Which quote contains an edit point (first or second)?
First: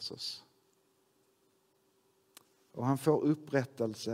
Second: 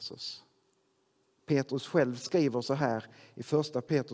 second